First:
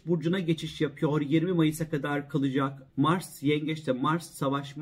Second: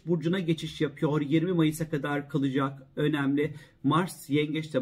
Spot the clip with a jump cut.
first; 1 cut; at 2.9 s

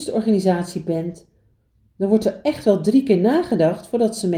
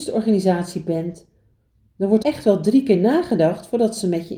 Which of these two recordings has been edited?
second; 1 cut; at 2.2 s

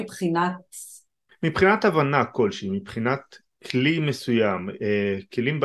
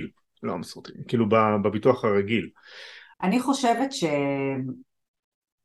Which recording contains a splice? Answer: second; 1 cut; at 3.1 s

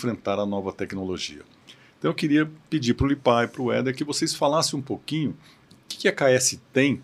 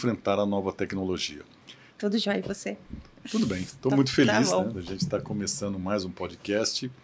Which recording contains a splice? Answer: second; 1 cut; at 1.9 s

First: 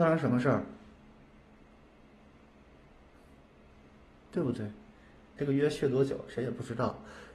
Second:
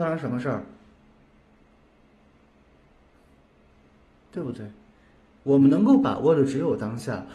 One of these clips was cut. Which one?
first; 1 cut; at 5.4 s

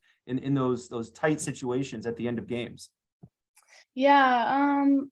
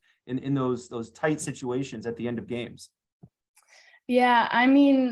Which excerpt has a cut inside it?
first; 1 cut; at 3.8 s

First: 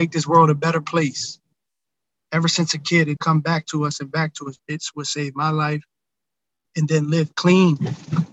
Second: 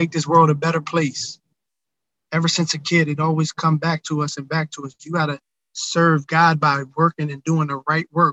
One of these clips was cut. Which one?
first; 3 cuts; at 3.2 s, 4.6 s, 6.6 s

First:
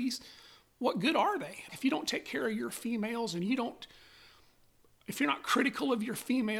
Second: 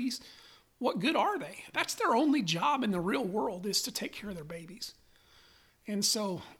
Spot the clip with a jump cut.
first; 1 cut; at 1.7 s

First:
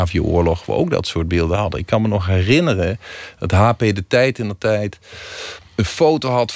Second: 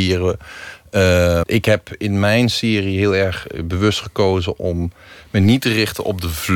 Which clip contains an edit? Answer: second; 1 cut; at 1.4 s

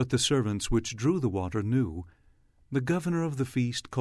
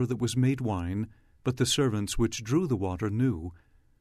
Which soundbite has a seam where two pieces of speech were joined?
second; 1 cut; at 1.4 s

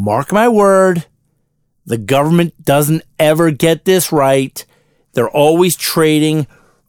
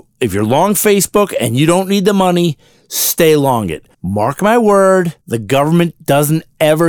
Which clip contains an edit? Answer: second; 2 cuts; at 3.9 s, 5.2 s

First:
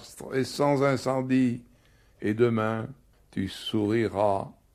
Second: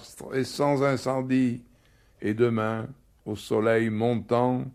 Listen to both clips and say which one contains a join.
first; 1 cut; at 3.1 s

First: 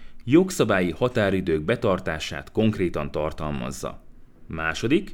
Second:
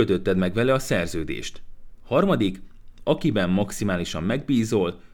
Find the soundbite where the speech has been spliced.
second; 1 cut; at 3.0 s

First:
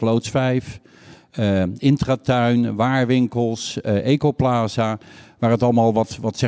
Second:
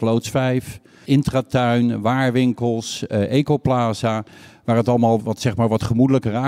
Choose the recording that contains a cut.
second; 2 cuts; at 1.0 s, 5.2 s

